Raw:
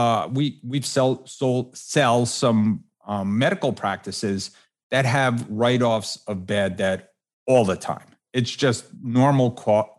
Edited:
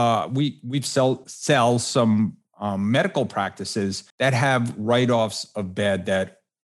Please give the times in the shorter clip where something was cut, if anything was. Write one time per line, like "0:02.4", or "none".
0:01.2
0:04.1